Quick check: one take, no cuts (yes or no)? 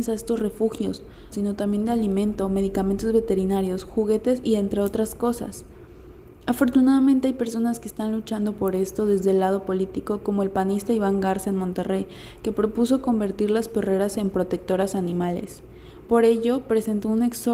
no